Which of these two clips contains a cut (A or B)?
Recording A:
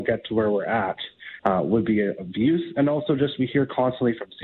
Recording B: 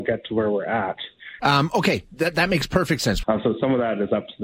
B